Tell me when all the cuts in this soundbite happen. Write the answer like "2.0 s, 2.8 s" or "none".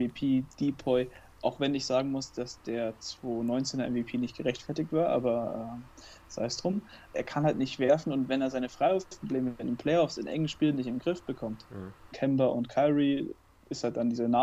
7.1 s, 12.1 s